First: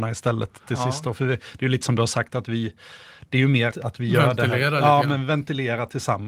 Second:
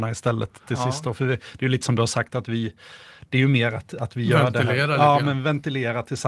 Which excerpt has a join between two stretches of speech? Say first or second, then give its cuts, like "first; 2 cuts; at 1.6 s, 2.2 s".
first; 1 cut; at 3.7 s